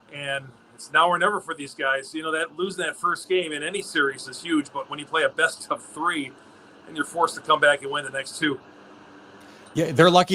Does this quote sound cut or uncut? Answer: uncut